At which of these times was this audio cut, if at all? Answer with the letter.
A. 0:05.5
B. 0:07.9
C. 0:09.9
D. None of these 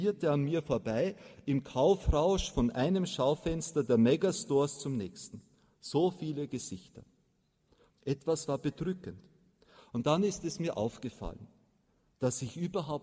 B